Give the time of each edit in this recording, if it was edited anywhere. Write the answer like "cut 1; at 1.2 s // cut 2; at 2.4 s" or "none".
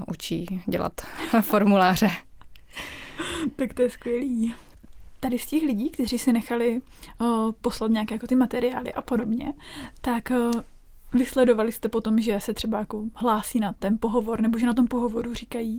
none